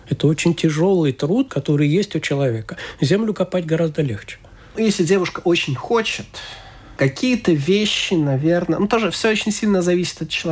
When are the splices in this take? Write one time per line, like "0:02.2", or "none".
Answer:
0:01.5